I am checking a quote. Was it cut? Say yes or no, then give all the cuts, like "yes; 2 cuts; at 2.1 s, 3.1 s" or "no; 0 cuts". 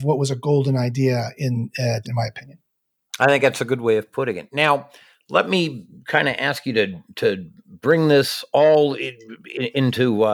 yes; 1 cut; at 2.0 s